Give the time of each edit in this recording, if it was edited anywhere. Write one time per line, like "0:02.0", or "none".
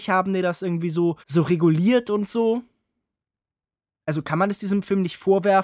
0:01.2